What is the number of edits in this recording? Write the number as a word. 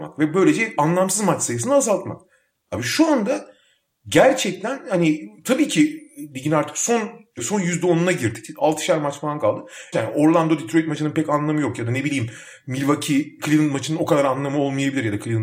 one